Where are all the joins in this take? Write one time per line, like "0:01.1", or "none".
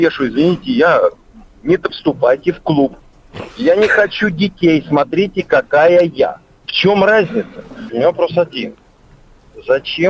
0:01.9
0:07.9